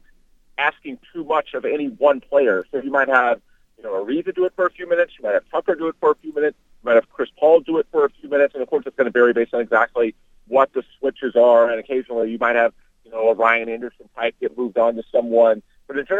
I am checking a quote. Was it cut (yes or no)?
no